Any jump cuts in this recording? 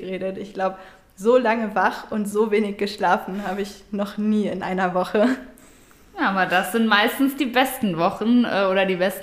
no; 0 cuts

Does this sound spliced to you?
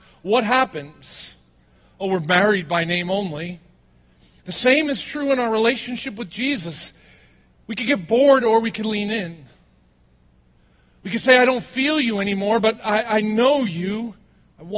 no; 0 cuts

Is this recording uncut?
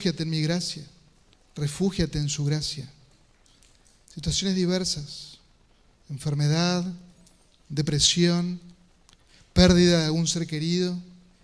no; 1 cut; at 1.3 s

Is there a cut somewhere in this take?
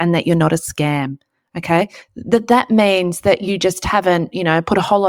yes; 1 cut; at 2.1 s

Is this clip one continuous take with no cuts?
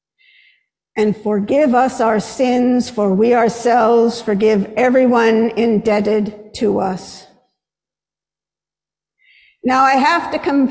yes; 0 cuts

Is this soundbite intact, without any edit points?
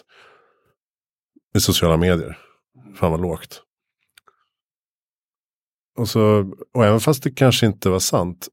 no; 1 cut; at 1.3 s

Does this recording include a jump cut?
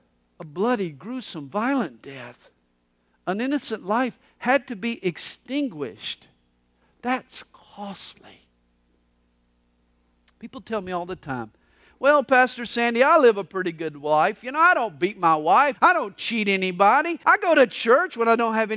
yes; 2 cuts; at 15.8 s, 17.2 s

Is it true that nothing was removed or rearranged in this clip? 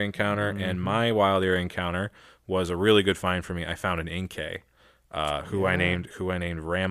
yes; 0 cuts

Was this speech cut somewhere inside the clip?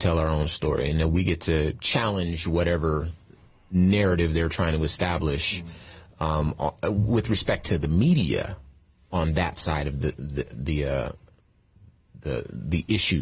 no; 0 cuts

